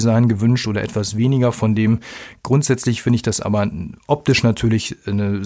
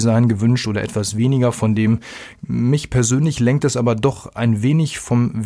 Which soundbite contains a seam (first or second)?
second